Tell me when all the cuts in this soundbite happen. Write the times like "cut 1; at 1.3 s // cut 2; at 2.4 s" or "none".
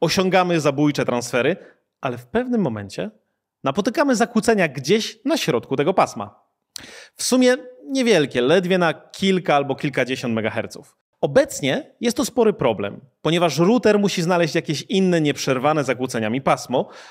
none